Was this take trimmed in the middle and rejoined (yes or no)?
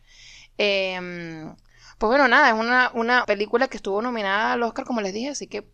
yes